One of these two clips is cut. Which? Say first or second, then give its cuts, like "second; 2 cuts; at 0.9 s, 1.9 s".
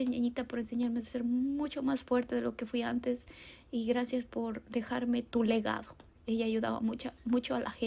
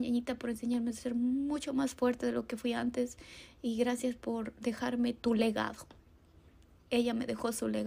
first; 1 cut; at 6.2 s